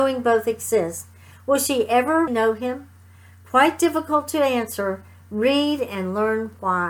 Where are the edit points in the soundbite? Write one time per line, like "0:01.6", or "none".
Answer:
0:02.3